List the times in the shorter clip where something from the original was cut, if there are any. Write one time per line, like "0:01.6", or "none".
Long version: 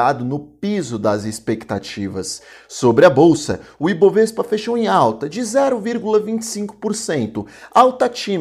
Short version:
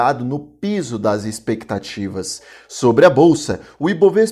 none